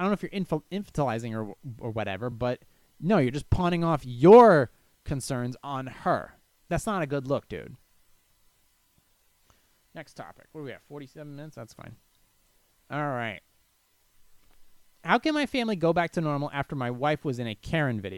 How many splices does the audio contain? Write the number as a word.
zero